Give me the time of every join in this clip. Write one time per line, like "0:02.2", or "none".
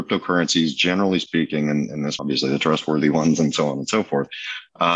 0:02.2